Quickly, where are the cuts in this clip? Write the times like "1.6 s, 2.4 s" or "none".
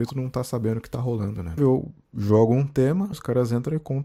1.6 s, 3.1 s